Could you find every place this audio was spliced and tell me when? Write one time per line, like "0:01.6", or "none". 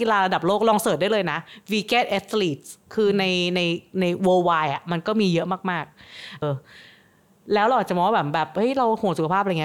0:06.4